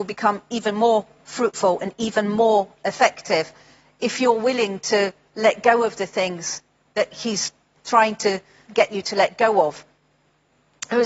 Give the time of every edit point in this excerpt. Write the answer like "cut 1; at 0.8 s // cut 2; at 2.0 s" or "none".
cut 1; at 8.6 s